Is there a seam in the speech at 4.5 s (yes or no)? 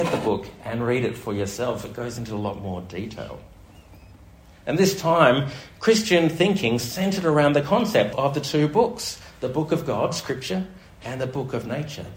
yes